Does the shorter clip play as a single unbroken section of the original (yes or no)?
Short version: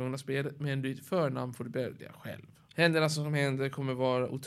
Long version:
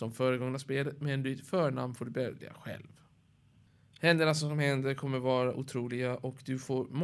no